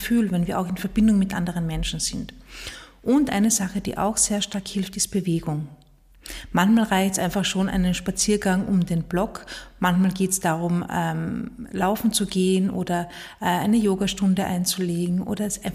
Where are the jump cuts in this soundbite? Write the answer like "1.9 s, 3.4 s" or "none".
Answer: none